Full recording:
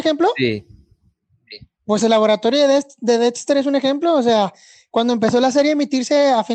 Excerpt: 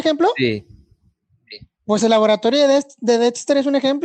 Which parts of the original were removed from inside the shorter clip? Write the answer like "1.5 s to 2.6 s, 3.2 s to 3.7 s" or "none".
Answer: none